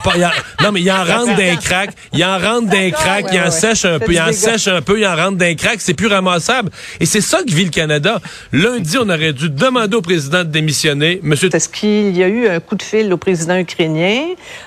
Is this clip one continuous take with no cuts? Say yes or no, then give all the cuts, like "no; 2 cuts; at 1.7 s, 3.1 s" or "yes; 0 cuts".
no; 1 cut; at 11.5 s